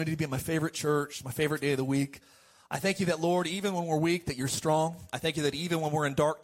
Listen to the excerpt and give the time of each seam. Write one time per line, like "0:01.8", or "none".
none